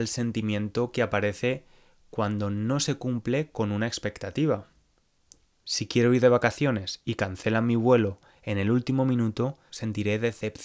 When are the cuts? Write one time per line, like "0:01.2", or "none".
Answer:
0:09.7